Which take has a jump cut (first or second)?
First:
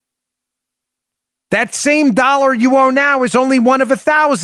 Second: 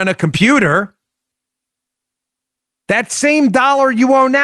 first